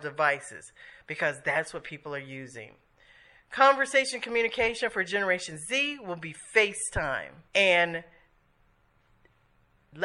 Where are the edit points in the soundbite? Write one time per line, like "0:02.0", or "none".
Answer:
0:07.5